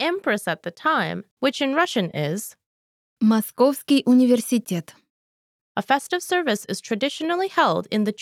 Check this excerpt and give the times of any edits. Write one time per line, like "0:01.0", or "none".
0:01.4
0:05.7